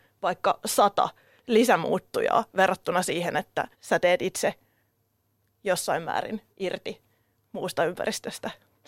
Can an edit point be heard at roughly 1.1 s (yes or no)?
no